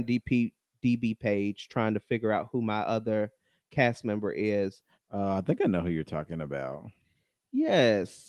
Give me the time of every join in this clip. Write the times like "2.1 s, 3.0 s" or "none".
4.9 s